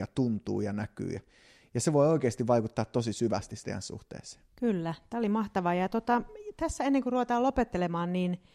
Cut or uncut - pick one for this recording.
cut